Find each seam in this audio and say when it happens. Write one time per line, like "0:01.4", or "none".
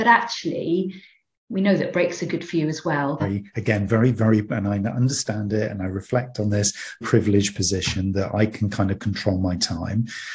0:03.2
0:07.0

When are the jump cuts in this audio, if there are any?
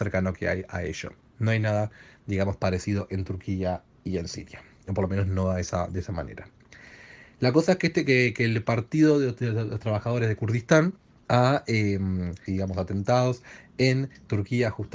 0:11.2
0:12.5

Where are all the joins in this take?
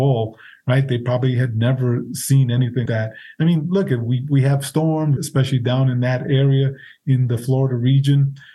0:02.9
0:05.2

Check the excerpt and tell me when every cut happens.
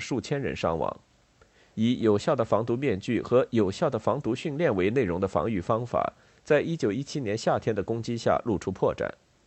none

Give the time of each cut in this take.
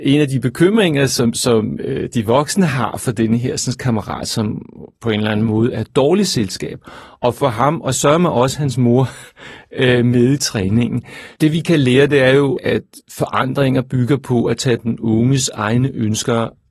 0:11.3
0:12.6

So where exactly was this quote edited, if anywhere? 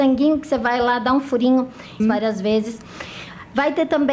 0:02.0

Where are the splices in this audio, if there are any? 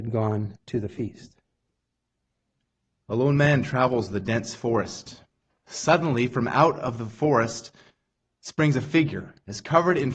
0:05.5

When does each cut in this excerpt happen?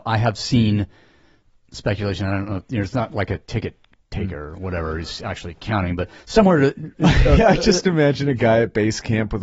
none

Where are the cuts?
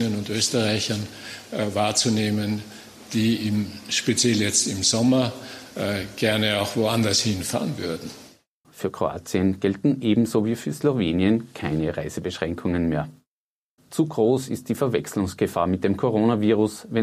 0:08.6
0:13.8

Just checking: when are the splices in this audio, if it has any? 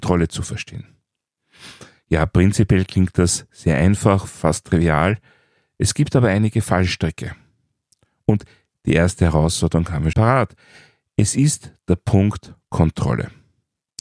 0:10.1

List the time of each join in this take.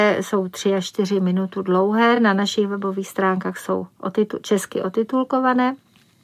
none

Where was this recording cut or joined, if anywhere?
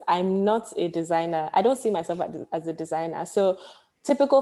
none

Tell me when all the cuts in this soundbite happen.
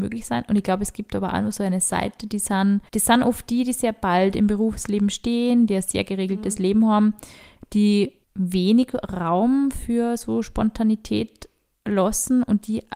0:02.9
0:05.7
0:08.2

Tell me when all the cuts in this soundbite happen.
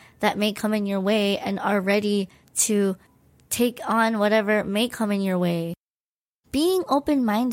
0:06.4

